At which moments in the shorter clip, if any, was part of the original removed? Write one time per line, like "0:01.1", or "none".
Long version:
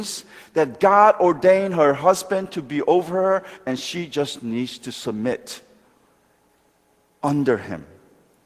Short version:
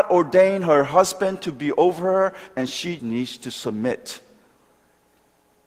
0:03.0